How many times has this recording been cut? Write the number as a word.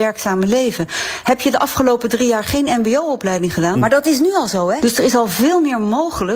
two